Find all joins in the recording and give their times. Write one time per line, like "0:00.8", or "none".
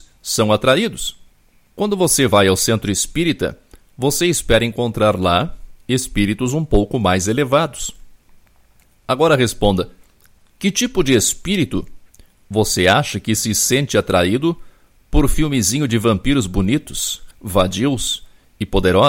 0:17.3